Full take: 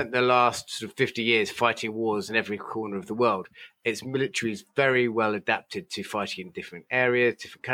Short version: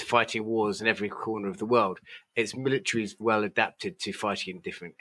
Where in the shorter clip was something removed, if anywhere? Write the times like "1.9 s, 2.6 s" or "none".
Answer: 3.2 s